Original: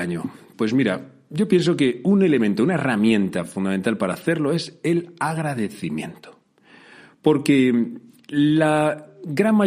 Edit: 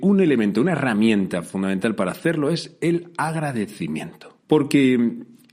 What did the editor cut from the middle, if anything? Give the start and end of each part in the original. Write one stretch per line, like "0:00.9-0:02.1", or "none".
0:06.4-0:07.2